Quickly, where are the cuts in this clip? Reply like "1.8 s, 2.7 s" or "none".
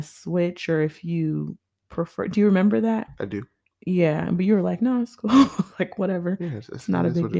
none